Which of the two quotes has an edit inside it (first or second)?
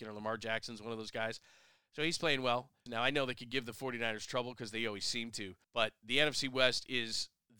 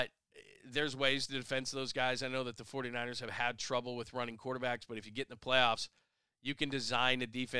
first